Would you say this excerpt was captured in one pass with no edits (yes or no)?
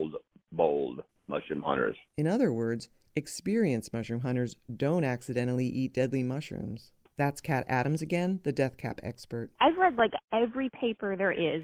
no